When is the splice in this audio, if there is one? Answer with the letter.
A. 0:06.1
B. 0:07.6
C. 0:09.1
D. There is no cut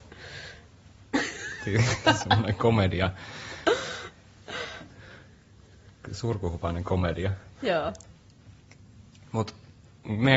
B